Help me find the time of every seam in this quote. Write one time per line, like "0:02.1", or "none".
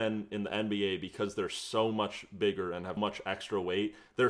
0:03.0